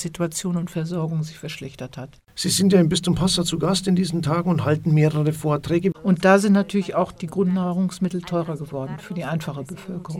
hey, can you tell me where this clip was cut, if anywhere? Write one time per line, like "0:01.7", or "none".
0:05.9